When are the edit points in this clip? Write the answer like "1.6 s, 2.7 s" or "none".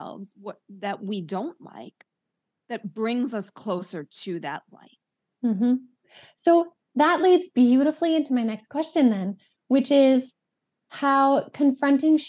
none